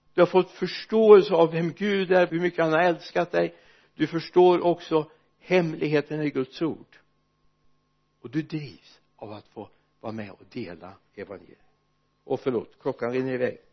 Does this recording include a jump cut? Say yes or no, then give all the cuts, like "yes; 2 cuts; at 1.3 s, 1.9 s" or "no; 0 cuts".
yes; 1 cut; at 2.3 s